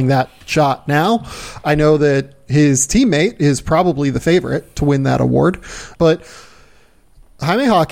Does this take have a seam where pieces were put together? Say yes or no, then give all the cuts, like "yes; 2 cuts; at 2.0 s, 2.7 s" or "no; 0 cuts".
yes; 1 cut; at 5.9 s